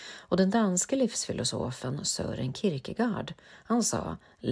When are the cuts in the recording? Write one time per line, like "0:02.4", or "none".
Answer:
none